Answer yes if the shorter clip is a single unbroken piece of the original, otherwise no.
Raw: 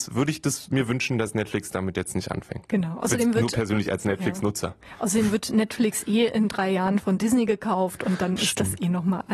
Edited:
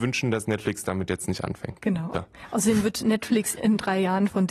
no